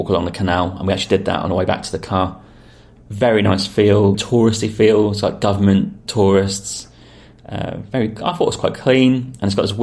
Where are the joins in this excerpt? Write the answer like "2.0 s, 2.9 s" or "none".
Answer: 4.1 s